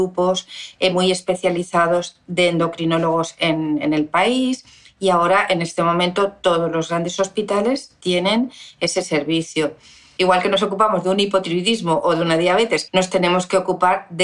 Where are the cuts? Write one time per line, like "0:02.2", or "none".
0:10.2
0:12.9